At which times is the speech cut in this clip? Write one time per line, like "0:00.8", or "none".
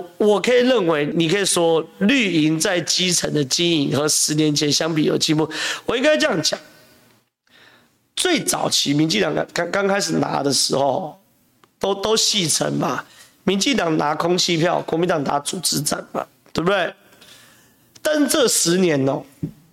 0:01.1